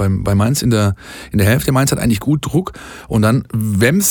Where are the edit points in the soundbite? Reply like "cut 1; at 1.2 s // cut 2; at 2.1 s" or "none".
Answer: none